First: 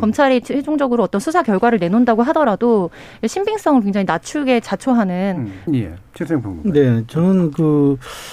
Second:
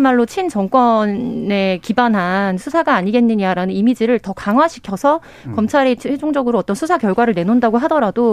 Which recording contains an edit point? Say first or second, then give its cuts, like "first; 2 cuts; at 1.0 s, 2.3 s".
first; 1 cut; at 5.7 s